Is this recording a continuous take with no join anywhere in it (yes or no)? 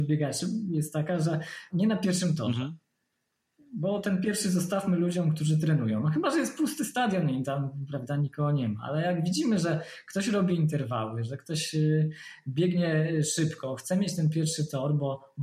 no